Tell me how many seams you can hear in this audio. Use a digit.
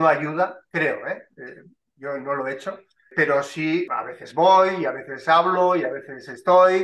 0